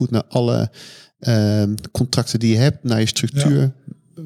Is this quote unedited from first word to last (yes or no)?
yes